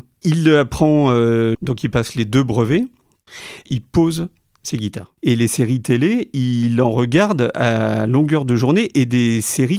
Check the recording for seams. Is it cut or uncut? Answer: cut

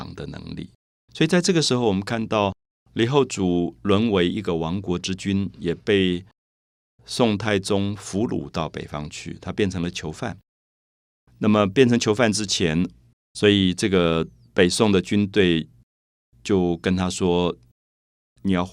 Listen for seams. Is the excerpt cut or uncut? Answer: cut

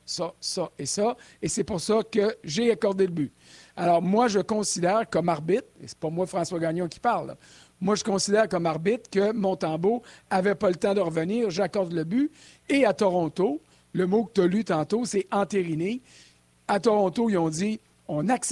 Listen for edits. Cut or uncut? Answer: uncut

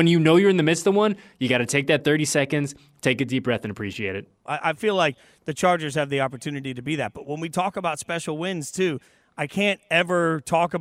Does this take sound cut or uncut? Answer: cut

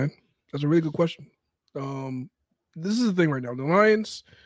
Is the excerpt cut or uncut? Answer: uncut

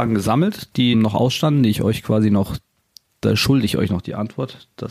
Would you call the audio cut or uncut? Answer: cut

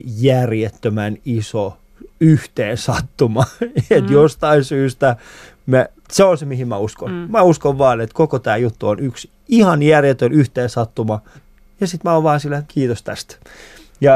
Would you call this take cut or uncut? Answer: cut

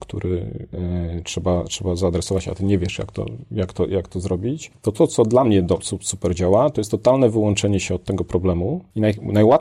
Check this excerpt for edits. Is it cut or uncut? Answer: uncut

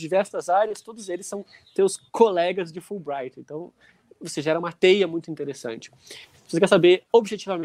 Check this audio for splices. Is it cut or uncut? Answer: uncut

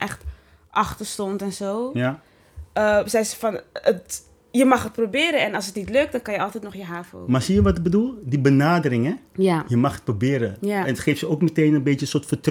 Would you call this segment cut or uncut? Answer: uncut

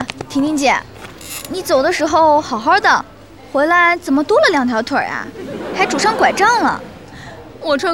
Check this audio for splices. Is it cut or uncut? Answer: uncut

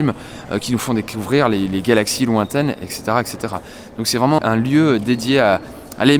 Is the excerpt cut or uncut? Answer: cut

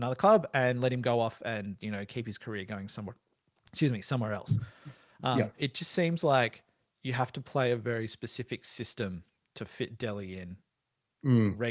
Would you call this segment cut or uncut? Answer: cut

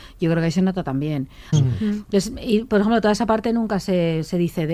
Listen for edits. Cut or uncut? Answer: cut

